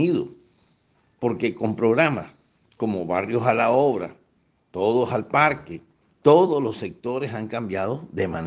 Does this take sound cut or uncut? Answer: cut